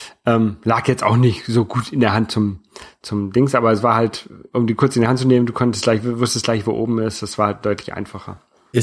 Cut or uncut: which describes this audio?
uncut